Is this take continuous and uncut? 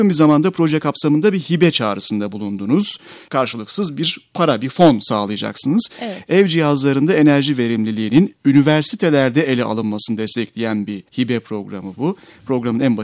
no; 1 cut; at 11.1 s

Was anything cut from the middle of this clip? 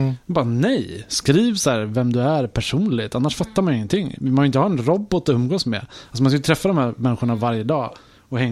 no; 0 cuts

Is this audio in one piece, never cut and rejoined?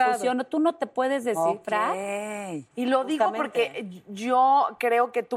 no; 1 cut; at 2.7 s

